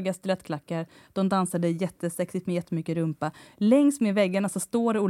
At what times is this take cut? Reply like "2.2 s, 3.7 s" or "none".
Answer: none